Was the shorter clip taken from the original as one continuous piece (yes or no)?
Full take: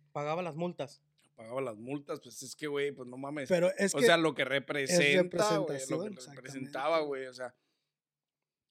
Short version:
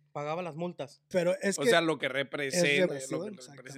no